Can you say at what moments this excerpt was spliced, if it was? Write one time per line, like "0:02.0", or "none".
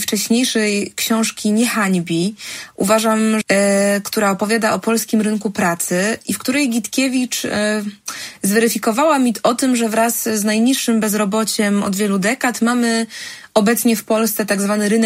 0:03.4